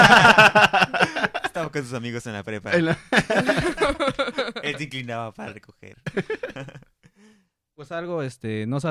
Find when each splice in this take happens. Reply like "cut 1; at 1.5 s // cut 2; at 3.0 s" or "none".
none